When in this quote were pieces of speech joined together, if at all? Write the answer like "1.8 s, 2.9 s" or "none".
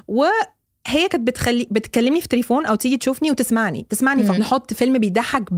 4.4 s